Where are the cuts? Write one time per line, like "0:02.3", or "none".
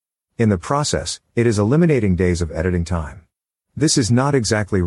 0:03.6